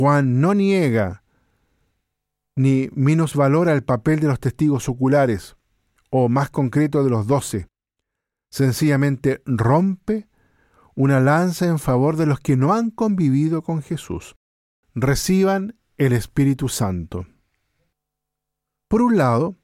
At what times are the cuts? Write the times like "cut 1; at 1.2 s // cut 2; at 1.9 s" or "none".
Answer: cut 1; at 14.8 s